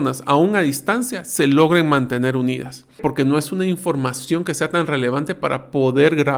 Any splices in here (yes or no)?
yes